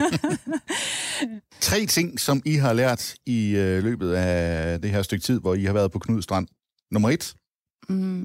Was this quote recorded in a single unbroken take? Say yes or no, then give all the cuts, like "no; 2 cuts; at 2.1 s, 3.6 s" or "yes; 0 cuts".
yes; 0 cuts